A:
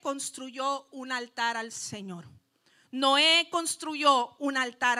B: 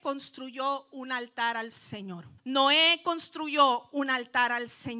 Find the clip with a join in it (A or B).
B